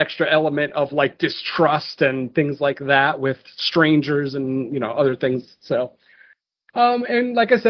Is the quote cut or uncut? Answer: uncut